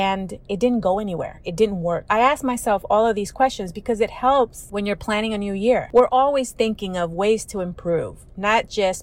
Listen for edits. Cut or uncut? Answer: cut